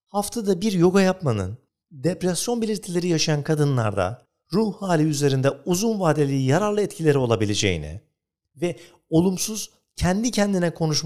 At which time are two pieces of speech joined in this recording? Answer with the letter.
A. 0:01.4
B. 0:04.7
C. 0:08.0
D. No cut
D